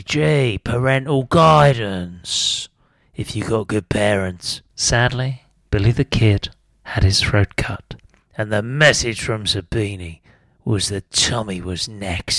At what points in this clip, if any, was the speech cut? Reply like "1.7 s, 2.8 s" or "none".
none